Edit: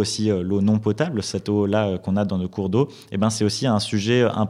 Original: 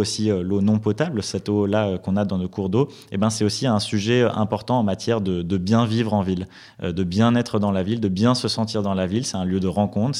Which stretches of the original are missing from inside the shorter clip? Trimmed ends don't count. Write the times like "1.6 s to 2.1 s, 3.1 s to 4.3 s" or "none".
none

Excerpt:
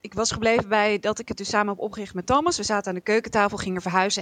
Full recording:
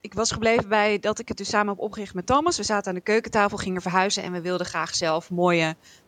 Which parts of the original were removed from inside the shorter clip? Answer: none

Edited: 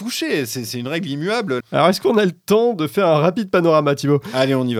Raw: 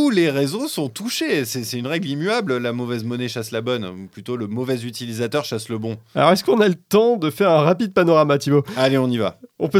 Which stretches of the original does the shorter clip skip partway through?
2.6 s to 6.0 s

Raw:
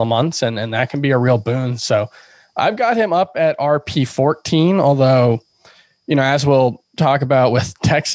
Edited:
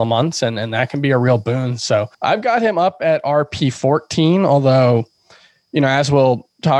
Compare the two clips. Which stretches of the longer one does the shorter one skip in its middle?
2.1 s to 2.5 s

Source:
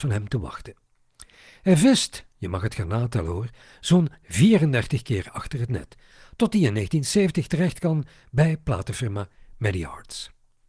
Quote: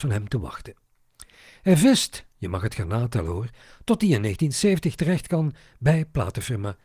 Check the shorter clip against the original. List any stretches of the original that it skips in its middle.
3.7 s to 6.2 s

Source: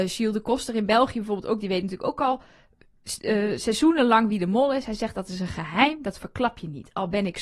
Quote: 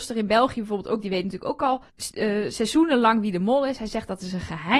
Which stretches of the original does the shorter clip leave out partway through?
2.5 s to 3.0 s

